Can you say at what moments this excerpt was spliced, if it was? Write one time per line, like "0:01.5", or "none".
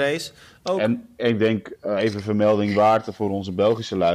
0:01.2